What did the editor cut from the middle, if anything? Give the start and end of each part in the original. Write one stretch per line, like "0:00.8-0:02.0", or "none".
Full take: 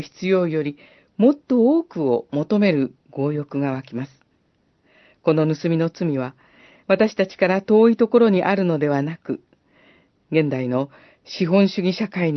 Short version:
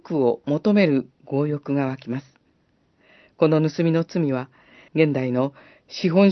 0:06.7-0:10.2